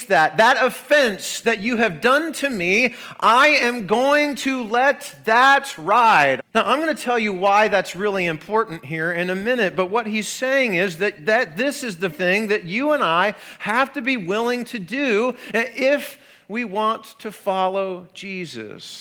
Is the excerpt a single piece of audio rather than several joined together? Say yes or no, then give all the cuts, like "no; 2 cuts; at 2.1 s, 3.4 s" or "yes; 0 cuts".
no; 2 cuts; at 6.4 s, 12.1 s